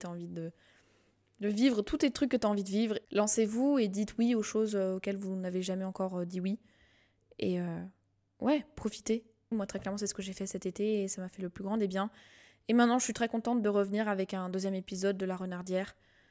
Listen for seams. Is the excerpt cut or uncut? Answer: cut